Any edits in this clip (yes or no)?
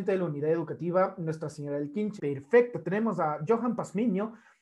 yes